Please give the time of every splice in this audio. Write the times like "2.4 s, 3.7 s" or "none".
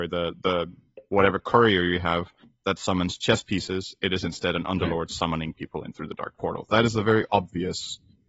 none